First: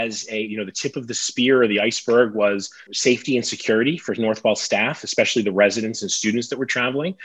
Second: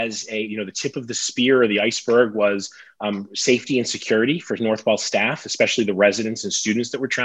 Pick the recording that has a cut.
first; 1 cut; at 2.9 s

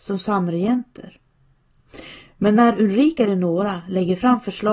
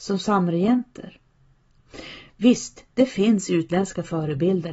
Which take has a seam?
second; 1 cut; at 2.3 s

